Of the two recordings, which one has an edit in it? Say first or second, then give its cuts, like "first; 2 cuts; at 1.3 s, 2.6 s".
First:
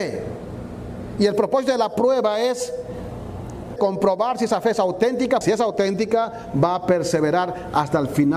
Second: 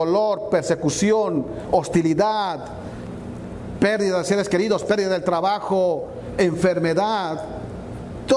first; 2 cuts; at 3.8 s, 5.4 s